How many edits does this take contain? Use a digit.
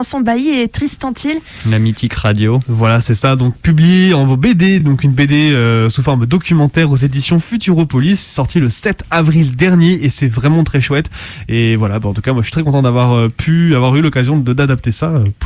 0